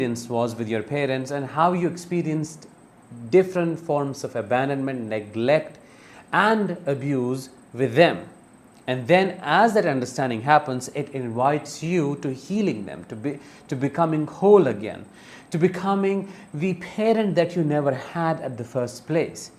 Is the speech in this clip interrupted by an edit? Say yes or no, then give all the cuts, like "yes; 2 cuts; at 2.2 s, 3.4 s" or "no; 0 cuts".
no; 0 cuts